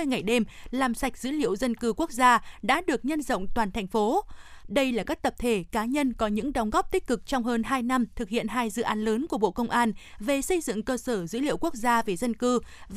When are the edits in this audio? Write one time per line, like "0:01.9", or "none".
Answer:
0:04.6